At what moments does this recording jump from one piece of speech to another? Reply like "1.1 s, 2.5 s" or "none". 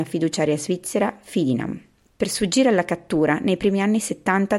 2.1 s